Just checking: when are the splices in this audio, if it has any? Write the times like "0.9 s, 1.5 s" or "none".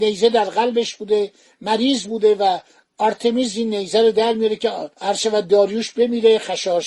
4.9 s